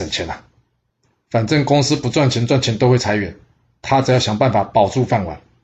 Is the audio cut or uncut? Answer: uncut